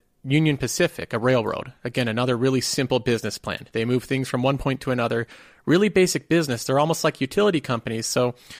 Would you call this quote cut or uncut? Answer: uncut